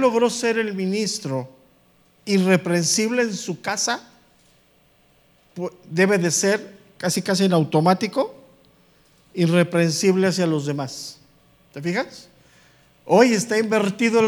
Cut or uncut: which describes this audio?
uncut